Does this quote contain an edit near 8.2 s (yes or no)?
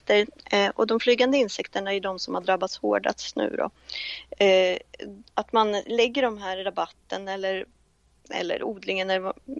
no